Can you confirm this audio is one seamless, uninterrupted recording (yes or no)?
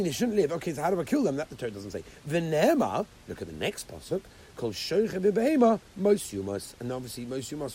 yes